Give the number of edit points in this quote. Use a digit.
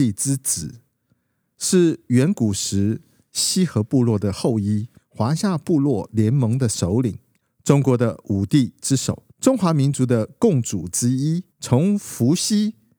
3